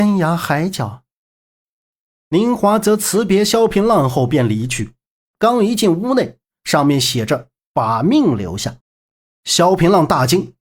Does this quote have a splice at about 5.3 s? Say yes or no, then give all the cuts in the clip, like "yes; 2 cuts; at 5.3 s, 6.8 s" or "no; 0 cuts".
yes; 3 cuts; at 5.3 s, 6.5 s, 8.8 s